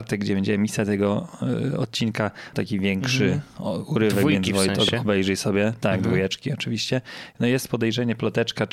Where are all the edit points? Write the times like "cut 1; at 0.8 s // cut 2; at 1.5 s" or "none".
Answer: cut 1; at 2.5 s